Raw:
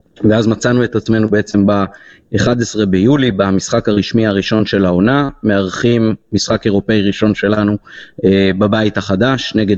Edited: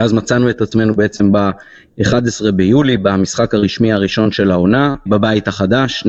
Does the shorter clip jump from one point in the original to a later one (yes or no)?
yes